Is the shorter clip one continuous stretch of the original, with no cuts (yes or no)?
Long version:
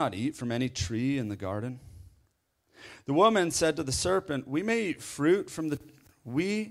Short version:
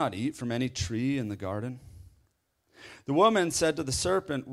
yes